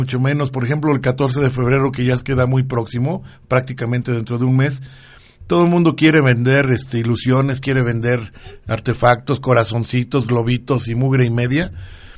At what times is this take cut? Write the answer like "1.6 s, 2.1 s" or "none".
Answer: none